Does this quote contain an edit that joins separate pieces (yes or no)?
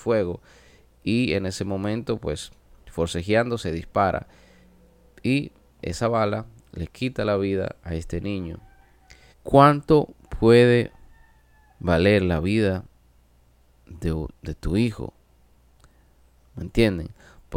yes